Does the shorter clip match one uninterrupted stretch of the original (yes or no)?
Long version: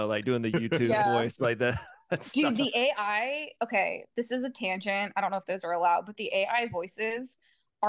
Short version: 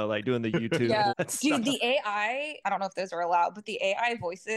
no